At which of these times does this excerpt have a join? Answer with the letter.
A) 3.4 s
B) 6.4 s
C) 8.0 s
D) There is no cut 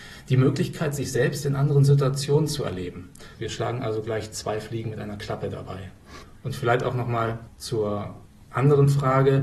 A